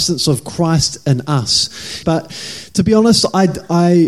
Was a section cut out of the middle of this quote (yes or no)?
yes